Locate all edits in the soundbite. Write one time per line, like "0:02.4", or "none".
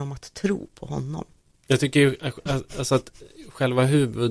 0:01.6